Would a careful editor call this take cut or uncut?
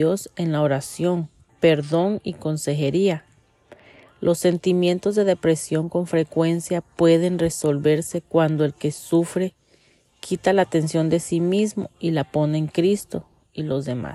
cut